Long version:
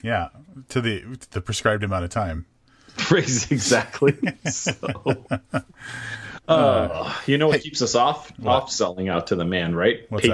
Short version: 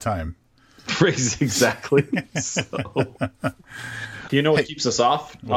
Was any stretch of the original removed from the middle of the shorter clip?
yes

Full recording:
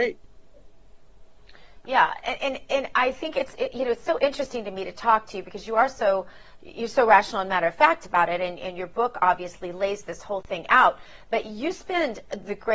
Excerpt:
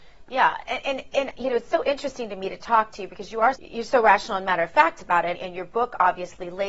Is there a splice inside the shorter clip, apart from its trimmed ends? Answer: yes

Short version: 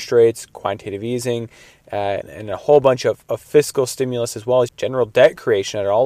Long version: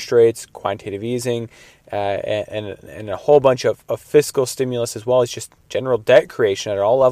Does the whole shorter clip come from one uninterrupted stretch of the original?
no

